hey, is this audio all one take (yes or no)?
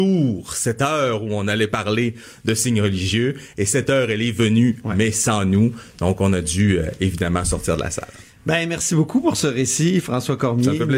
yes